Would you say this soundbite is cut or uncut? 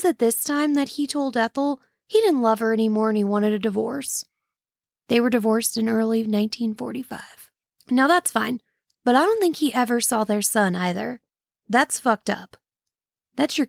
cut